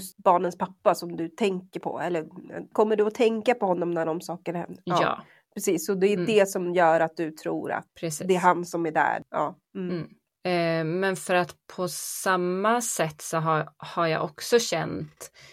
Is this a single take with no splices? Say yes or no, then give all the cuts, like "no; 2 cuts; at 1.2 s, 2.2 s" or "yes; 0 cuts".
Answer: yes; 0 cuts